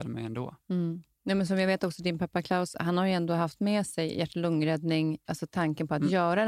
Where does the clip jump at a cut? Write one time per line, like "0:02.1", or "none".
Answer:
0:05.2